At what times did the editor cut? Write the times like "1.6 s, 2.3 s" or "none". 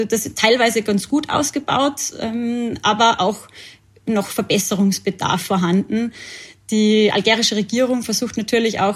none